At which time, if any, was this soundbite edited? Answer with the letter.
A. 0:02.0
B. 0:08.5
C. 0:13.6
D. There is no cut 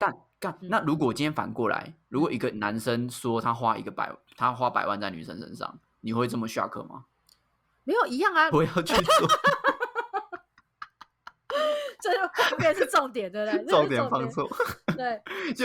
B